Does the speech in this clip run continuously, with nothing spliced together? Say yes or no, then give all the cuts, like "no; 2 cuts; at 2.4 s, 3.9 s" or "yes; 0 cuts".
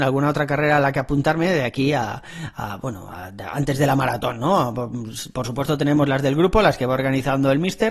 yes; 0 cuts